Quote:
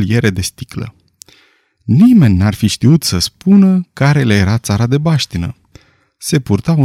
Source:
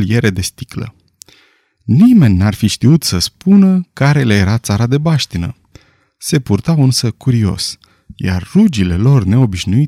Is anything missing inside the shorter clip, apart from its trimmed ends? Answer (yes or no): no